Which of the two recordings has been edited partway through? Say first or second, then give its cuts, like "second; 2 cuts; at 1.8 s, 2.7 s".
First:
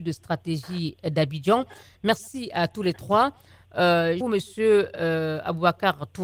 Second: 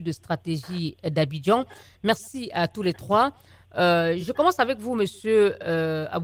first; 1 cut; at 4.2 s